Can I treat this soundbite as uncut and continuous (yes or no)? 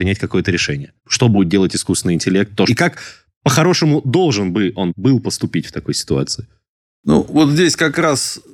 no